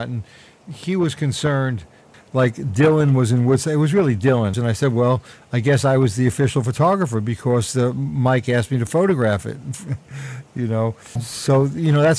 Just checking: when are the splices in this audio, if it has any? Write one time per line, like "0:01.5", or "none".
0:02.1
0:04.5
0:11.2